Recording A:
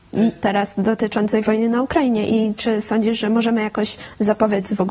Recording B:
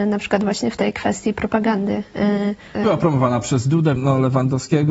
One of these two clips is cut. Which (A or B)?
B